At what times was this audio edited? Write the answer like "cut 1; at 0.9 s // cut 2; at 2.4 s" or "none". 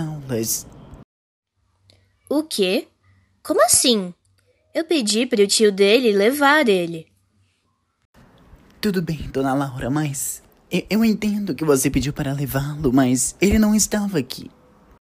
none